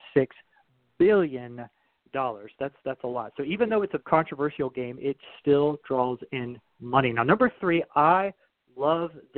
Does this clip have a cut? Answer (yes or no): yes